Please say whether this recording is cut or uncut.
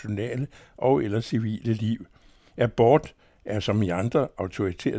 uncut